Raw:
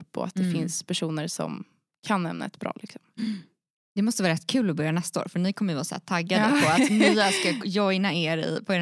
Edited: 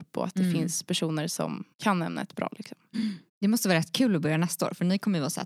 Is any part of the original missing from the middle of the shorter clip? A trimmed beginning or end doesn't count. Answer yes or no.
yes